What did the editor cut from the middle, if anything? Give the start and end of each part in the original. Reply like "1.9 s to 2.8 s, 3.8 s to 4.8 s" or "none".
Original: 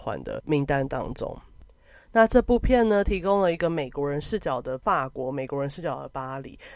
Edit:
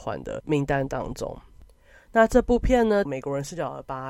3.1 s to 5.3 s